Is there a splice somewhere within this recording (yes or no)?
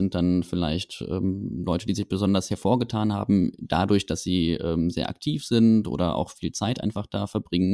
no